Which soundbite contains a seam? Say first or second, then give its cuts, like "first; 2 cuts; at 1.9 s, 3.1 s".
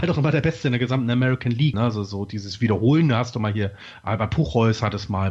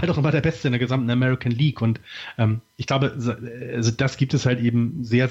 first; 1 cut; at 1.7 s